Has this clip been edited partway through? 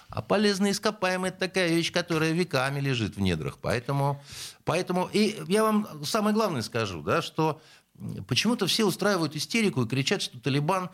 no; 0 cuts

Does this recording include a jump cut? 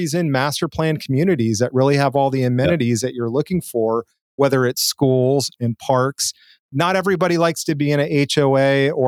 no; 0 cuts

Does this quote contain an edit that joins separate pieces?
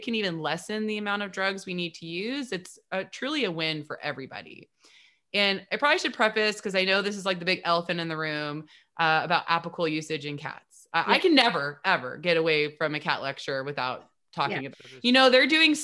yes; 2 cuts; at 11.8 s, 14.7 s

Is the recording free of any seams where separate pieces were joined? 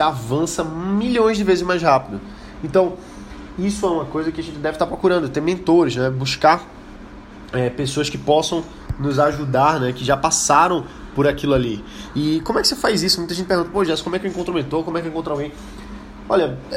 yes; 0 cuts

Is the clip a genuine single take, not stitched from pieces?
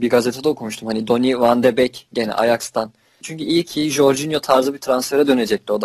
no; 1 cut; at 3.2 s

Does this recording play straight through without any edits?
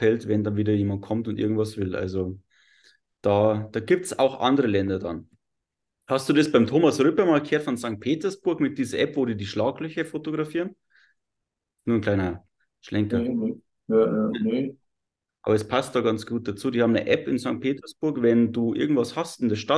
yes; 0 cuts

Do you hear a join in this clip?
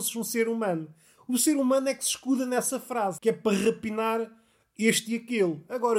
yes; 1 cut; at 3.2 s

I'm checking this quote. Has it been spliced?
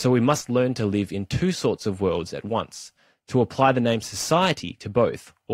no; 0 cuts

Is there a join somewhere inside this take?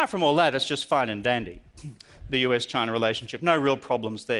no; 0 cuts

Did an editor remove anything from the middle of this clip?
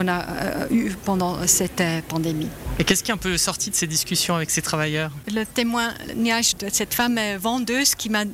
no; 0 cuts

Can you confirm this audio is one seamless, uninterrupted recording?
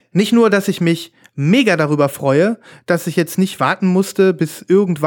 yes; 0 cuts

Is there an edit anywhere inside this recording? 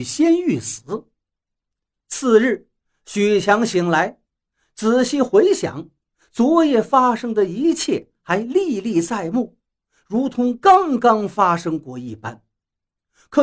no; 0 cuts

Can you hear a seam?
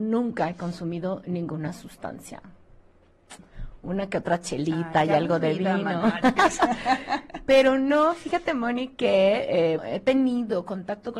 yes; 1 cut; at 9.8 s

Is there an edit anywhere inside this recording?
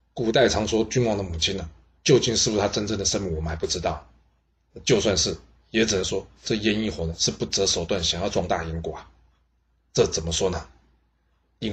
no; 0 cuts

